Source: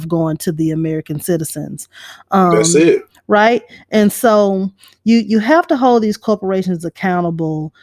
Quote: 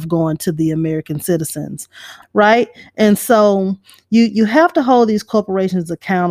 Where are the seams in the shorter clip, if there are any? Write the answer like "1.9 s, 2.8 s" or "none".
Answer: 2.2 s

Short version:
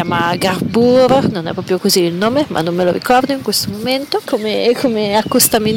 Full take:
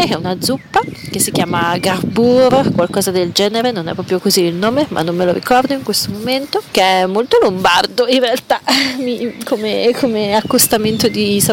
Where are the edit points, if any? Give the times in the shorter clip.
1.3 s, 4.3 s

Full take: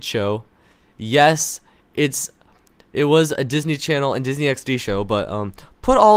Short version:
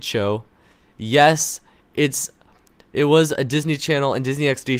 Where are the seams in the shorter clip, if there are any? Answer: none

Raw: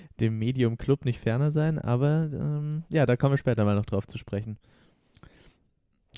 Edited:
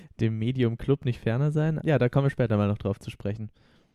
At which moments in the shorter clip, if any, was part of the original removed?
1.8 s

